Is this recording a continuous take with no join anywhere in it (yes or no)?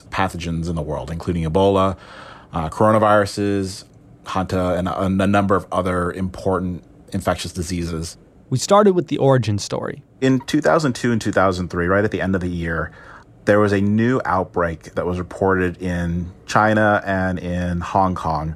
yes